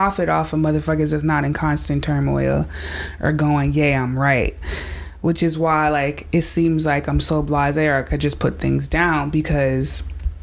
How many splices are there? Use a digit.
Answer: 0